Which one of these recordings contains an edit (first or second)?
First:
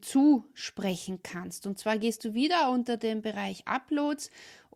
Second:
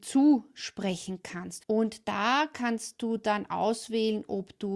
second